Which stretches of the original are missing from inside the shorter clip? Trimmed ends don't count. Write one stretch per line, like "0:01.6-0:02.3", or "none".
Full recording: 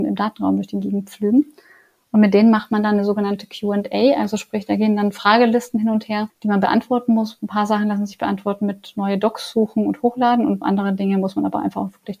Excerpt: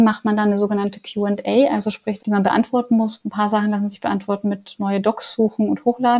0:04.7-0:06.4